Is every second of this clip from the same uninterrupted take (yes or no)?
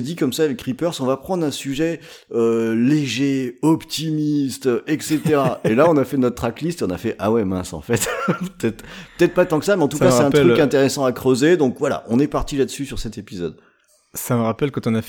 yes